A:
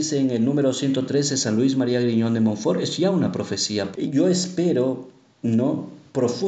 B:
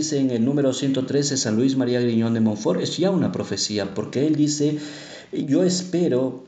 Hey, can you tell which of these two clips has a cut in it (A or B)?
A